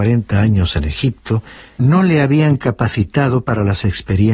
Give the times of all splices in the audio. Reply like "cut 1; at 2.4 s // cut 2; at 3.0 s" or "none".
cut 1; at 1.8 s

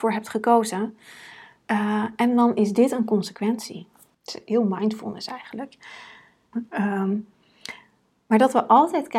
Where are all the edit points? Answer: cut 1; at 4.1 s // cut 2; at 6.5 s

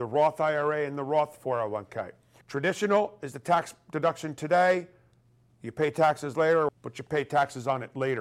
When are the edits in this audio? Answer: cut 1; at 2.4 s // cut 2; at 6.7 s

